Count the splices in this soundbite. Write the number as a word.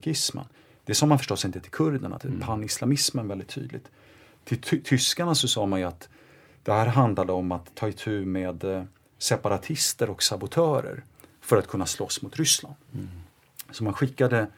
one